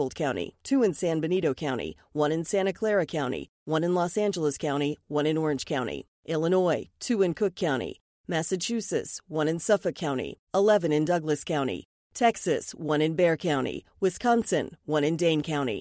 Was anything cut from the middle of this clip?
yes; 2 cuts; at 3.6 s, 10.5 s

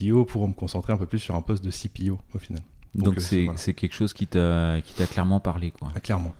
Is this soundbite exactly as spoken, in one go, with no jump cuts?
yes; 0 cuts

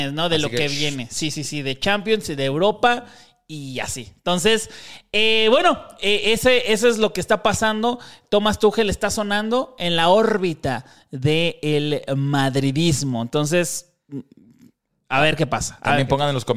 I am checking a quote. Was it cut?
no; 0 cuts

